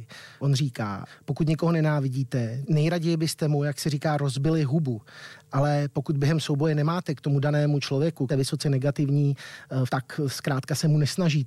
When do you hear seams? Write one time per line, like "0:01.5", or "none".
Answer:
0:08.3
0:09.9